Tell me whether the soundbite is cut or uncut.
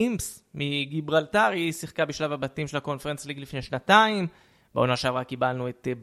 uncut